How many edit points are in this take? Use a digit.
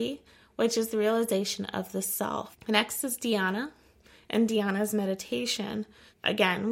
1